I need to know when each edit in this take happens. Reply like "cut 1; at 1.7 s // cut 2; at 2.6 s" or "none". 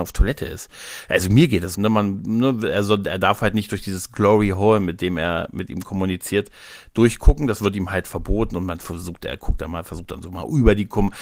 cut 1; at 1.7 s